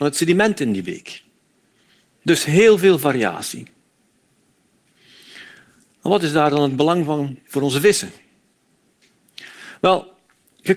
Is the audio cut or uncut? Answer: uncut